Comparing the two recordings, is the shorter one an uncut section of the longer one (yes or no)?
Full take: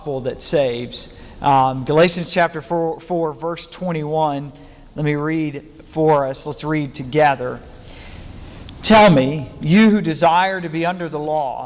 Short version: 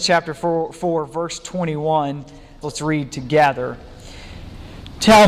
no